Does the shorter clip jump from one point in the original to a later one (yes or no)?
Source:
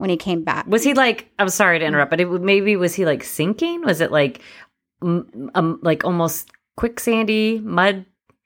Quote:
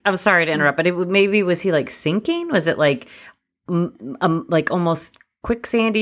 no